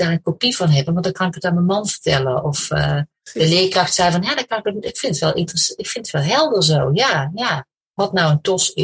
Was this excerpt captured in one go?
yes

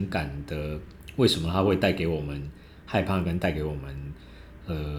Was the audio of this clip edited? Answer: no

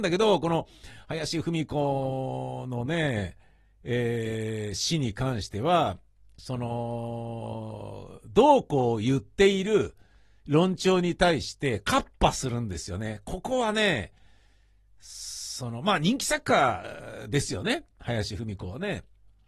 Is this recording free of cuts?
yes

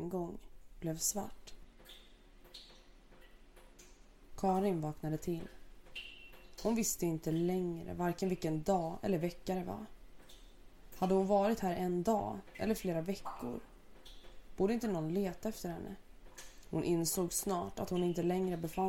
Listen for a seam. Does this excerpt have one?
no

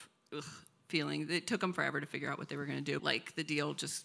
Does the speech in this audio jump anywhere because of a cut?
yes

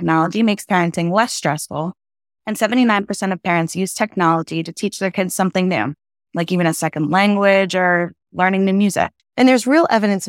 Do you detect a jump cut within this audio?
yes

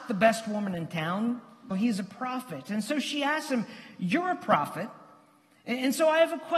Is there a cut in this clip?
yes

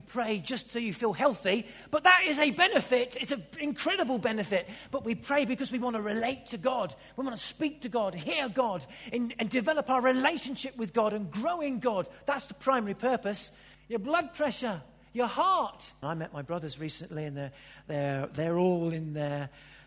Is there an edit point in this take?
yes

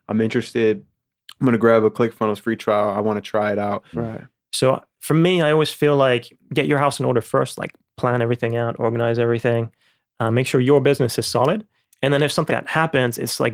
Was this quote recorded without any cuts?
no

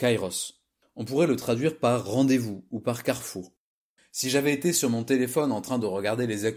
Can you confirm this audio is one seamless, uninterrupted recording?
no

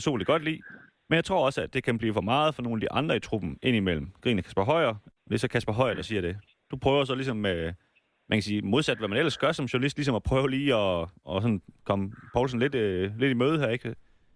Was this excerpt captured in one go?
no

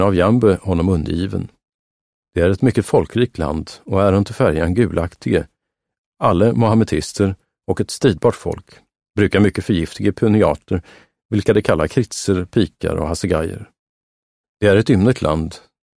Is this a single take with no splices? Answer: yes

